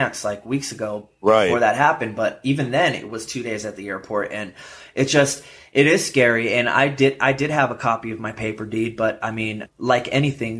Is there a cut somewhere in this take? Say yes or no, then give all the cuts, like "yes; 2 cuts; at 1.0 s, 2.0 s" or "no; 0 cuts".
no; 0 cuts